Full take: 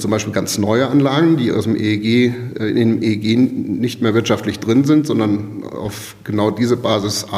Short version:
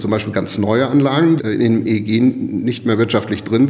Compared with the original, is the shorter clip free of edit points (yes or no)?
no